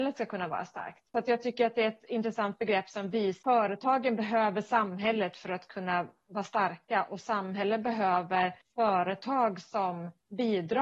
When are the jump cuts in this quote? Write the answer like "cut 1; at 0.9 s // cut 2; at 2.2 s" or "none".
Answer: cut 1; at 1.1 s // cut 2; at 3.4 s